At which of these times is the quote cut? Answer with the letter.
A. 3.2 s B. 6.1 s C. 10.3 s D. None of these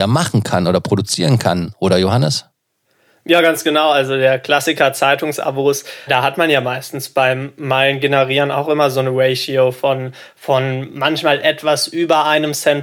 B